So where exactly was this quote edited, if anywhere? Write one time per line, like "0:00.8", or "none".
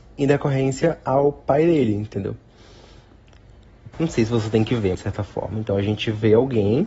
0:03.9
0:04.9